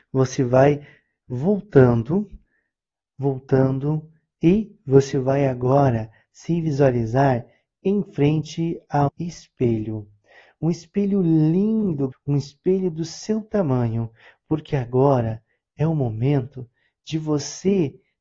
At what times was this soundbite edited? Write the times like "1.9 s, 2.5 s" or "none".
9.1 s, 12.1 s